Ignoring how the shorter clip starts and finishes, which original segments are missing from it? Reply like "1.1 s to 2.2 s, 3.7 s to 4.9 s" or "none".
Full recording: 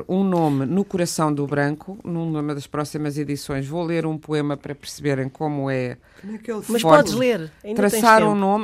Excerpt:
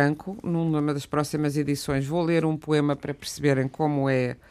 none